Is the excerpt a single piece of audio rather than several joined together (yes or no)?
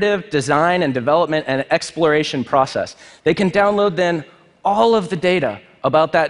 yes